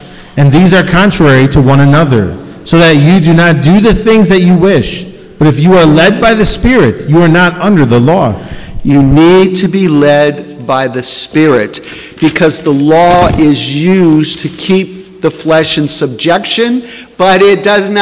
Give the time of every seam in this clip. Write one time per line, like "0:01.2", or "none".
none